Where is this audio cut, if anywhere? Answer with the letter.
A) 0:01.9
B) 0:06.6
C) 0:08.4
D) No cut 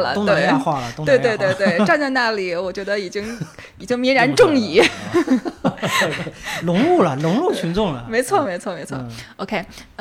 C